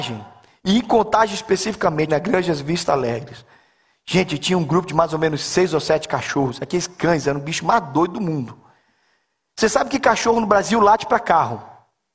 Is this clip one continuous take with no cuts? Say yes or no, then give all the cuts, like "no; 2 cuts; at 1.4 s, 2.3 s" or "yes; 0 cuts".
no; 1 cut; at 2.1 s